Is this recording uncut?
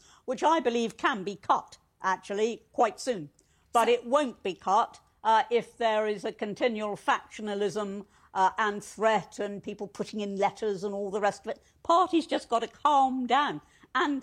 yes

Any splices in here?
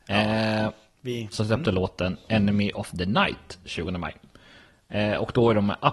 yes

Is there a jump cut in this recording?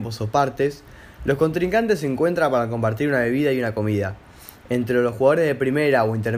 no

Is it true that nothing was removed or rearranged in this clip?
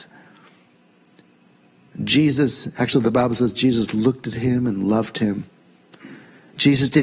yes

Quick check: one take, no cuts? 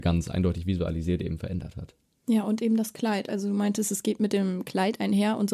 yes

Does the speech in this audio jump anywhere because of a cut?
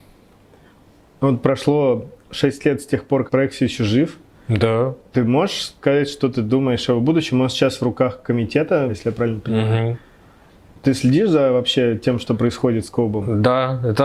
yes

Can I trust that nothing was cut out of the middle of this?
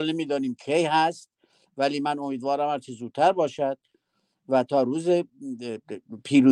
yes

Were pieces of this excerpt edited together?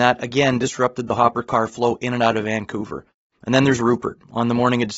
no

